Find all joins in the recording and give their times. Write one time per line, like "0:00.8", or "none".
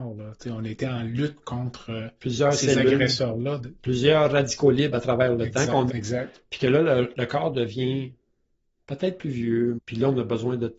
0:05.9
0:09.8